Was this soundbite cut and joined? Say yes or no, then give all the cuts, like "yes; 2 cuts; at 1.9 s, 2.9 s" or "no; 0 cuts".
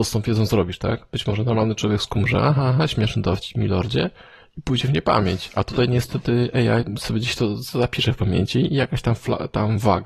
no; 0 cuts